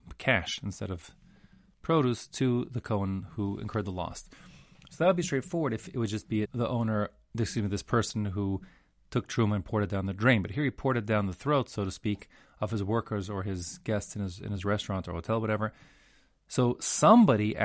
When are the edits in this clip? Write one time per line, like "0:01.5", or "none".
0:06.4